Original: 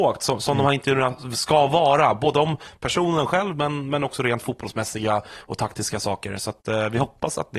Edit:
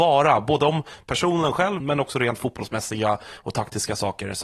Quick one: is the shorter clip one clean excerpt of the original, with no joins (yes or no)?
no